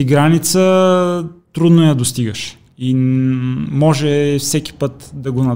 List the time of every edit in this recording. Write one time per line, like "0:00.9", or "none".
none